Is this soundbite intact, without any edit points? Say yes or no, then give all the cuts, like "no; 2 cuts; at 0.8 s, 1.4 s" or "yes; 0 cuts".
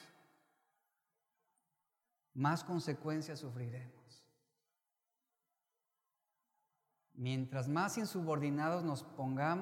yes; 0 cuts